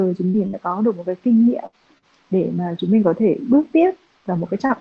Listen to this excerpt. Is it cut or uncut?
uncut